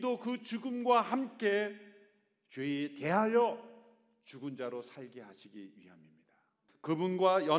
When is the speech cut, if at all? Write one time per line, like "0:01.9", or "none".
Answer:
0:06.7